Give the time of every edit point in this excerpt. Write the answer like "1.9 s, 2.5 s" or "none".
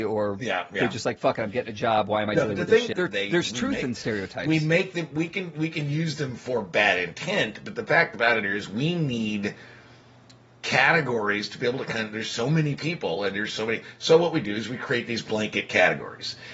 2.9 s